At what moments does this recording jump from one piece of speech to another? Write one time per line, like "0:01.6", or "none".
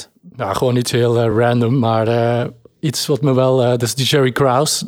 none